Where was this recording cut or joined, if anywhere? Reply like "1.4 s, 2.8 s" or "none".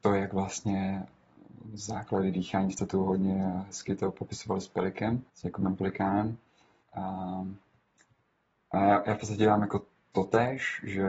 5.3 s, 6.8 s